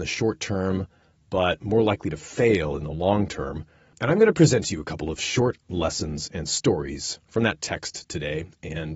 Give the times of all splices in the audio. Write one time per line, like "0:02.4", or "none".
0:03.9